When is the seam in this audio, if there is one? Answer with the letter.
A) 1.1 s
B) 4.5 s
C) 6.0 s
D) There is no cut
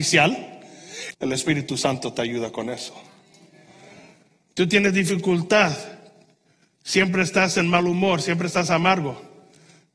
A